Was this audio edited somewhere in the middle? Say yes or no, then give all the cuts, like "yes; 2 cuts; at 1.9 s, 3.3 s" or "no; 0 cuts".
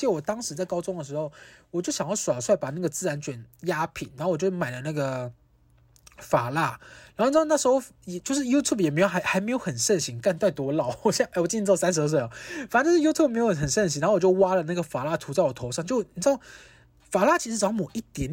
no; 0 cuts